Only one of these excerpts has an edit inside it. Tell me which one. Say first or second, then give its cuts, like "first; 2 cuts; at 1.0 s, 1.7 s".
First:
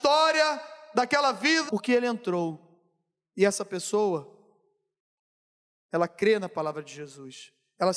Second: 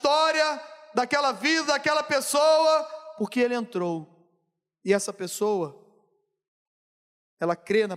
first; 1 cut; at 1.7 s